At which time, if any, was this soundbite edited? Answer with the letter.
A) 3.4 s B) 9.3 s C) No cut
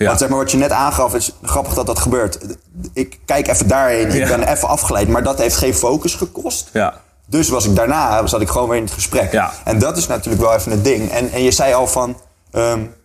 C